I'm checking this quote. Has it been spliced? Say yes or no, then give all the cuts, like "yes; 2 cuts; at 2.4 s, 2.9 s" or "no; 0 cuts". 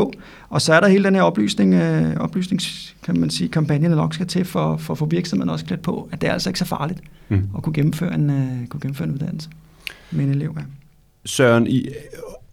yes; 1 cut; at 10.0 s